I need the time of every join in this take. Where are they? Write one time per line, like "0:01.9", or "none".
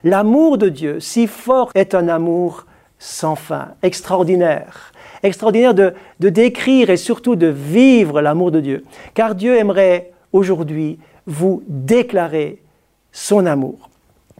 0:01.7